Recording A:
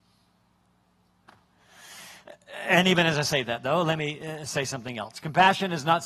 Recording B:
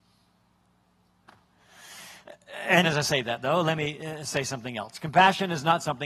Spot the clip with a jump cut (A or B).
B